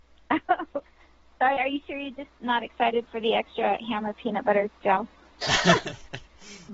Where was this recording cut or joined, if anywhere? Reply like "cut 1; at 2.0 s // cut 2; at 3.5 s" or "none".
cut 1; at 1.6 s